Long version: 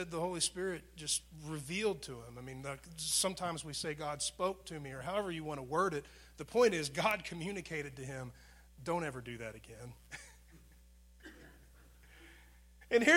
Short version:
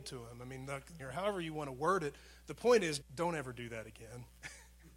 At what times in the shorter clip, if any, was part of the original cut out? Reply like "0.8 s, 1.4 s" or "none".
1.0 s, 3.0 s

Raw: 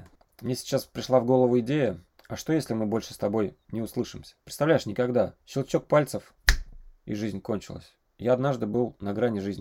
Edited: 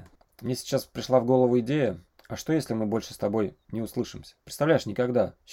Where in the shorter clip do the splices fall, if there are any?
none

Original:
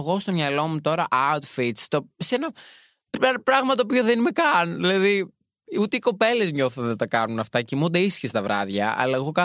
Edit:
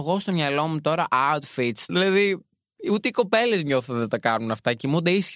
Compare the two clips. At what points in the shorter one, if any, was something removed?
1.9 s

